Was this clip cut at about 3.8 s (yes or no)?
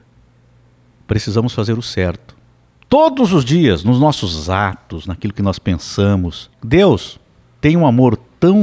no